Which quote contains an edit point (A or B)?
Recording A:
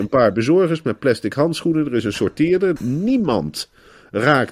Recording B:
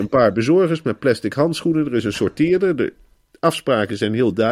A